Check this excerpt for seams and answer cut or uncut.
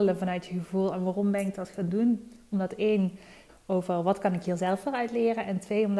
cut